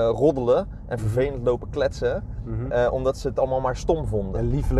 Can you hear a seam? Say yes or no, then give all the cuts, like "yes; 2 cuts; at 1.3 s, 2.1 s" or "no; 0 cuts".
no; 0 cuts